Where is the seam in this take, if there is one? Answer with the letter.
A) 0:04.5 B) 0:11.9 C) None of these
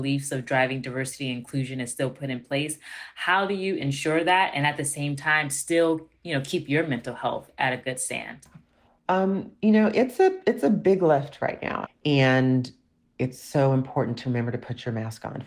B